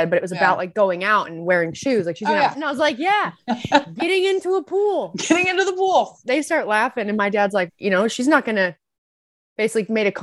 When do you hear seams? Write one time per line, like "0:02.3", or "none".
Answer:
0:02.5
0:06.2
0:07.7